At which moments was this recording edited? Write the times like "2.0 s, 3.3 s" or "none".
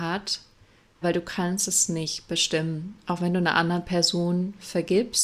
1.0 s

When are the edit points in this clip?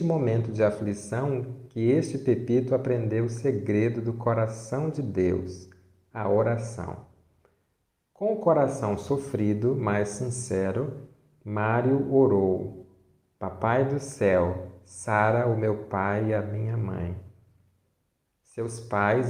none

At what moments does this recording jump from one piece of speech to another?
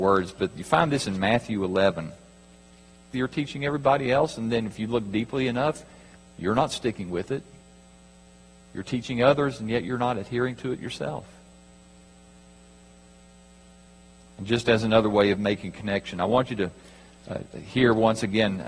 3.1 s

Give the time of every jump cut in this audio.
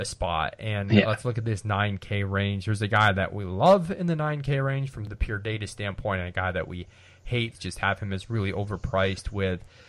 7.5 s

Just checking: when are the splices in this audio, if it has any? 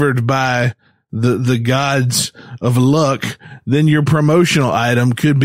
none

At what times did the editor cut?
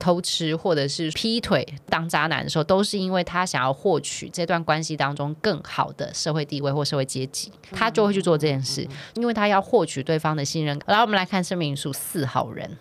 7.7 s, 10.8 s

